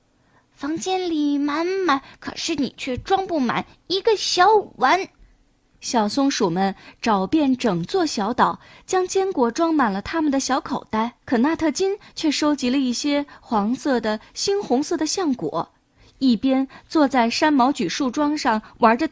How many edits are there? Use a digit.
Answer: 2